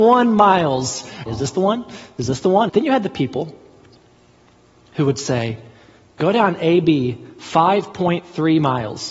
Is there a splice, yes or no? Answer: yes